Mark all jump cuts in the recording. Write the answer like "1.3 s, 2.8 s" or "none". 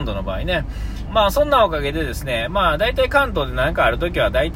1.1 s